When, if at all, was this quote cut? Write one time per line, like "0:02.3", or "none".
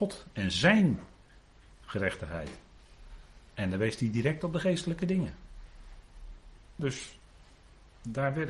0:06.8

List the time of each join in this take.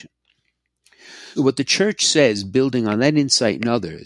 0:01.4

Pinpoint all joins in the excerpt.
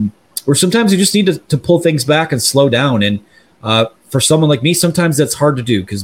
none

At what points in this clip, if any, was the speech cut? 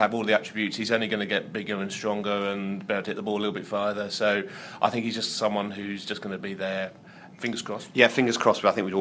0:07.3

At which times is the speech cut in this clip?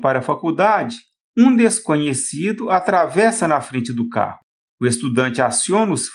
none

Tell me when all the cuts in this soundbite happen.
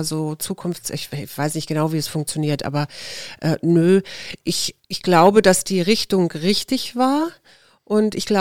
none

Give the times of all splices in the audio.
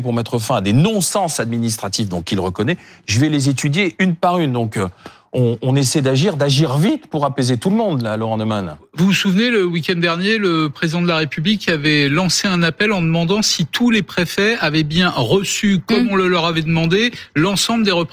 none

